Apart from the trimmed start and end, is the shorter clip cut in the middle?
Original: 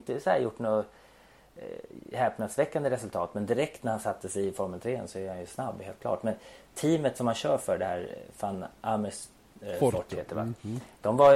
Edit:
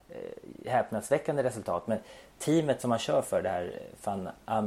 yes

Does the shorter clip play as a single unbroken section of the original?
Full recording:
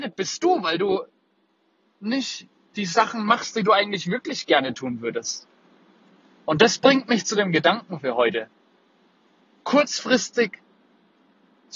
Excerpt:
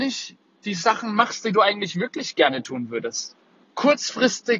no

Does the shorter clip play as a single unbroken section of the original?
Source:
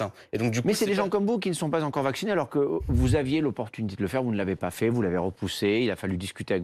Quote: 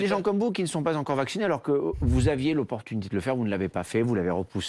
yes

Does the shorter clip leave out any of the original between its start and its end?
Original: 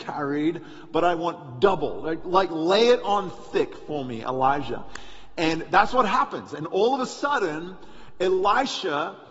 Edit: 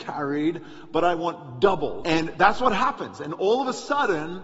yes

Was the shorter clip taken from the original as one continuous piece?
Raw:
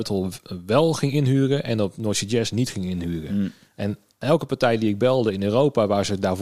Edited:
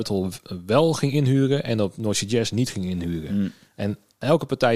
yes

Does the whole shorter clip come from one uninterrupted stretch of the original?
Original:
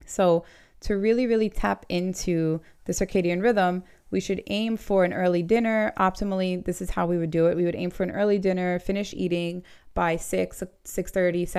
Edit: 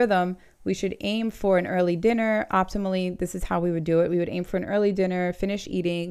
yes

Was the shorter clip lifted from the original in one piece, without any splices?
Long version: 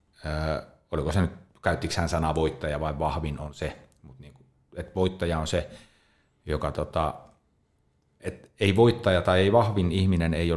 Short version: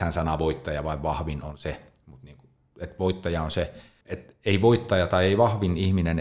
no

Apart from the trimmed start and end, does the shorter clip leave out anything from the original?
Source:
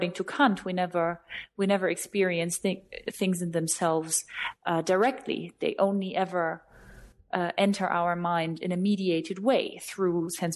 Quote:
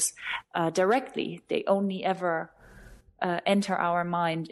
no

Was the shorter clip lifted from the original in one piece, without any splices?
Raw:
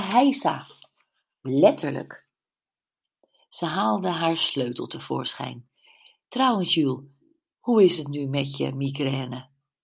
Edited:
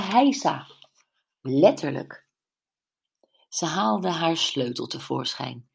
yes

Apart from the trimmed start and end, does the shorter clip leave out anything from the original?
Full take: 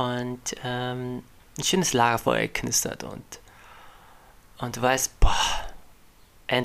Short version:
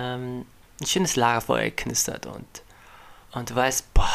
yes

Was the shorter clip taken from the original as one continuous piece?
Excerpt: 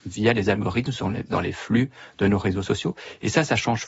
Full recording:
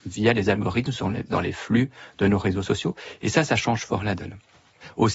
yes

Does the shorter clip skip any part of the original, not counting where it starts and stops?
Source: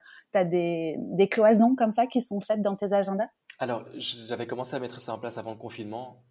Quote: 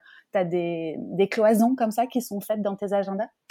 no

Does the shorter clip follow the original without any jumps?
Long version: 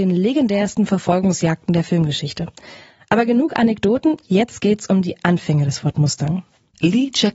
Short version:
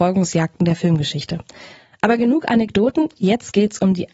yes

